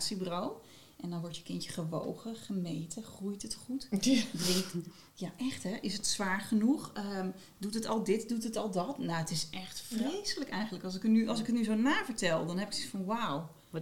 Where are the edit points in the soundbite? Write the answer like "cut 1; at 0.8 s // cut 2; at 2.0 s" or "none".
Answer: none